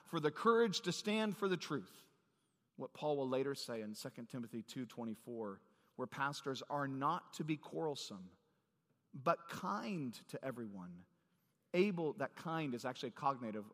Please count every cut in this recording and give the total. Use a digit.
1